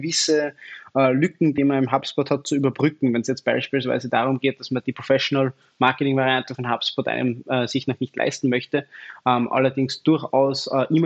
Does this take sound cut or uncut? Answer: uncut